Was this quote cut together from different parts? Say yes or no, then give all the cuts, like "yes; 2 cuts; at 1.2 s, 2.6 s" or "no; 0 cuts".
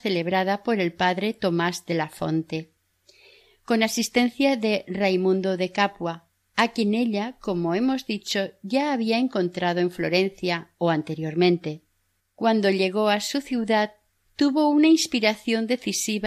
yes; 2 cuts; at 12.2 s, 14.2 s